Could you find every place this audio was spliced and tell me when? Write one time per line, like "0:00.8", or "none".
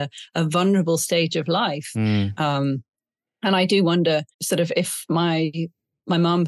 0:02.4
0:04.3